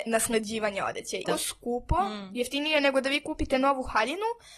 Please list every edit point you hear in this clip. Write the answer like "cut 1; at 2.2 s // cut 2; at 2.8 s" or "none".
cut 1; at 1.2 s